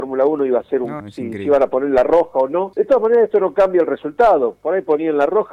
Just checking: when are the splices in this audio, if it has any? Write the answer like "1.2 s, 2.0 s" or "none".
1.0 s, 2.7 s